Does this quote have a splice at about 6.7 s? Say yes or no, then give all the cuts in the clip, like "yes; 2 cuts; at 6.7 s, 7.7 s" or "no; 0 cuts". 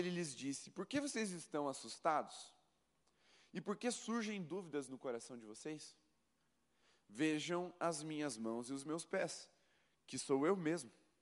no; 0 cuts